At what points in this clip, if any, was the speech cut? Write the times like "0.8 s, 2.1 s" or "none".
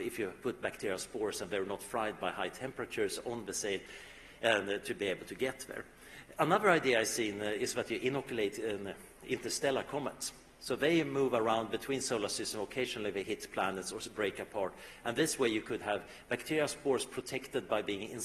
none